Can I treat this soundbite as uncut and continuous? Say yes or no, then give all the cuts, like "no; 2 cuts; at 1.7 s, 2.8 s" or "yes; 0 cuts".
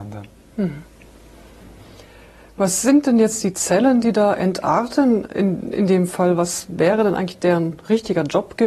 yes; 0 cuts